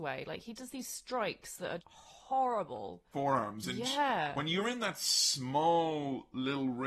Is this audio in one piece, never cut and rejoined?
no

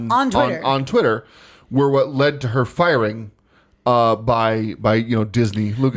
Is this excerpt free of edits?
yes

